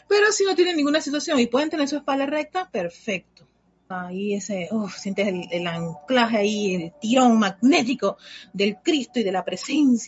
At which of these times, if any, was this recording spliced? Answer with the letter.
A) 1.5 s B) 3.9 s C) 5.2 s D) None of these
B